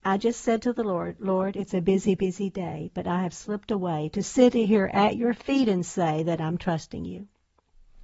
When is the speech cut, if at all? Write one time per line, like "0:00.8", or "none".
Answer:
none